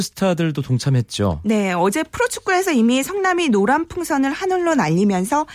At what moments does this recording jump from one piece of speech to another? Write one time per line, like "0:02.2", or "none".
none